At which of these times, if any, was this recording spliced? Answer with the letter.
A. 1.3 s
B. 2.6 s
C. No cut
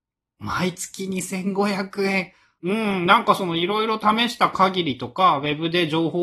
B